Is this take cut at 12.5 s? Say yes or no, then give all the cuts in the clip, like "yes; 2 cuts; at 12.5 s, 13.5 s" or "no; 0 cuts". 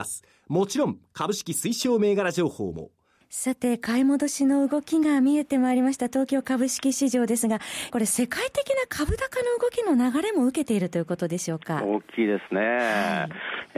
no; 2 cuts; at 3.2 s, 7.9 s